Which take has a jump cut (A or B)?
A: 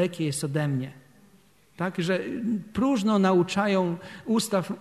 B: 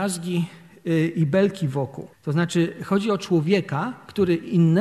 B